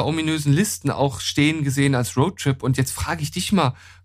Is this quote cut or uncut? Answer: uncut